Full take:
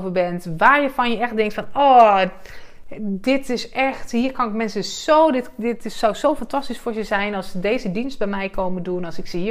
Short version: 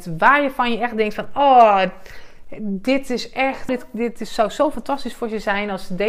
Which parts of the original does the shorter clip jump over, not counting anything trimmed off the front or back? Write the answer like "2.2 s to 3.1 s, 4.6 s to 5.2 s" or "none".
4.1 s to 5.3 s